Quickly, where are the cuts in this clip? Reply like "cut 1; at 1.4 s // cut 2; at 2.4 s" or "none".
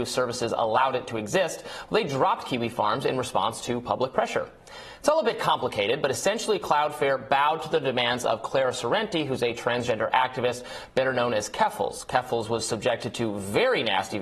none